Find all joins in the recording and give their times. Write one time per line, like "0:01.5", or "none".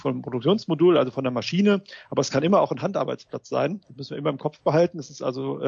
none